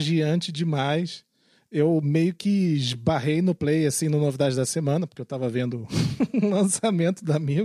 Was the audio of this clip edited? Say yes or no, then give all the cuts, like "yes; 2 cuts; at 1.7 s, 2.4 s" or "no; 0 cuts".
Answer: no; 0 cuts